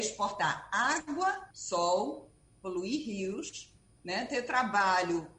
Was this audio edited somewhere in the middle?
yes; 2 cuts; at 1.5 s, 4.0 s

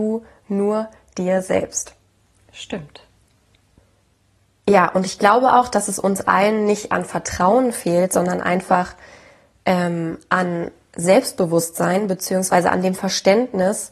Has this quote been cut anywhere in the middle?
no; 0 cuts

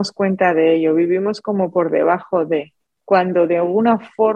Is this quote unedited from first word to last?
yes; 0 cuts

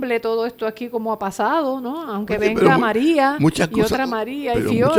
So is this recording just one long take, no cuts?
yes; 0 cuts

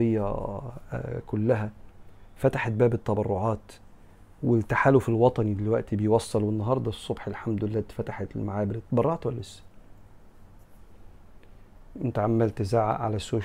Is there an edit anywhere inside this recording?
no; 0 cuts

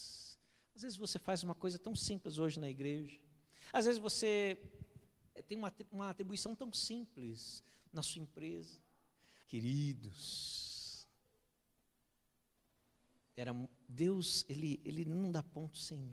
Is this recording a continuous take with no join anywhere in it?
no; 2 cuts; at 5.4 s, 9.4 s

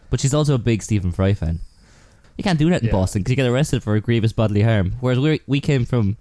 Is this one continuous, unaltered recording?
no; 1 cut; at 2.2 s

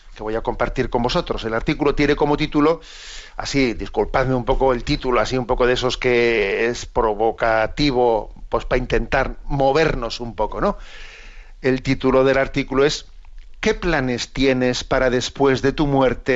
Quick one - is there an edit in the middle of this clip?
no; 0 cuts

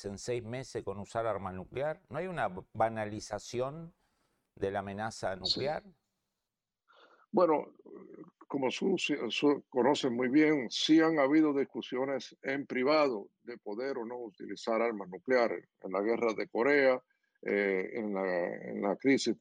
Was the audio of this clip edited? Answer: no; 0 cuts

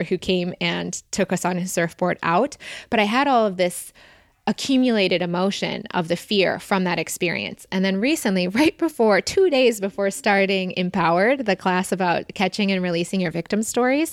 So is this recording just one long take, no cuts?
yes; 0 cuts

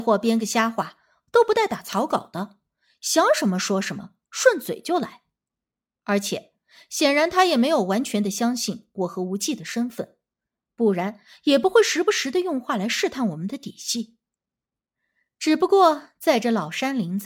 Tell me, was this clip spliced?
no; 0 cuts

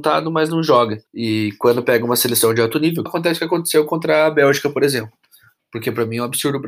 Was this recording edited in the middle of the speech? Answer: yes; 2 cuts; at 1.1 s, 3.1 s

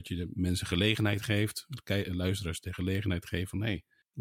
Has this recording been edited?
no; 0 cuts

